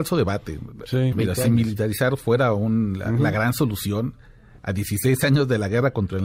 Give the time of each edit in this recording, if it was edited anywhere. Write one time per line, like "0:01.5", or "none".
0:01.1